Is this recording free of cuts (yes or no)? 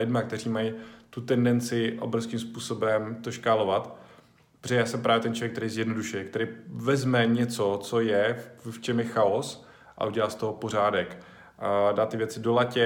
yes